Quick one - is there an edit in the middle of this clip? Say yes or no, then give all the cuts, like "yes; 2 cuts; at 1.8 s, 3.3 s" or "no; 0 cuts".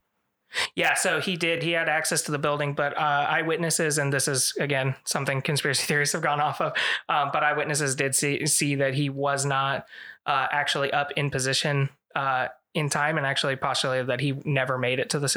no; 0 cuts